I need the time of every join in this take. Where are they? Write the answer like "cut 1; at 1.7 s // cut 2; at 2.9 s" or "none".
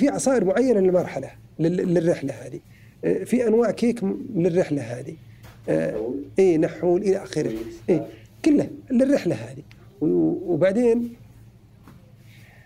none